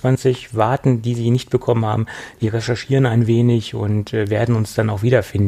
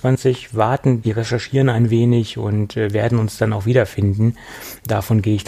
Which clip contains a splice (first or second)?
second